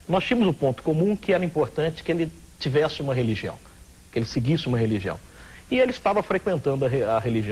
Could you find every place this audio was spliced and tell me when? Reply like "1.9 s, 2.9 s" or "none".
none